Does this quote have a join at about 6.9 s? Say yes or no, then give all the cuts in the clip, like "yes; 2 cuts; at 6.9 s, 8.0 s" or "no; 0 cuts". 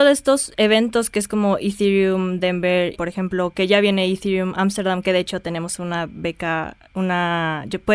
no; 1 cut; at 2.9 s